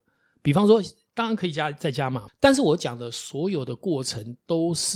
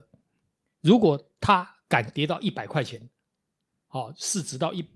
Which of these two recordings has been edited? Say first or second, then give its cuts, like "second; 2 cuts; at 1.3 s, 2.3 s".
first; 2 cuts; at 1.1 s, 2.3 s